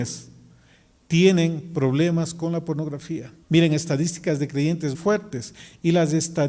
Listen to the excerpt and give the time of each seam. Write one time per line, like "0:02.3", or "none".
0:03.4
0:04.9